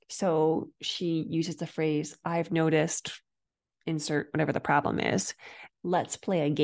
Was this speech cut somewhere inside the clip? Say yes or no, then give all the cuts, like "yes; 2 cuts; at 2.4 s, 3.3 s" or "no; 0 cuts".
yes; 1 cut; at 5.7 s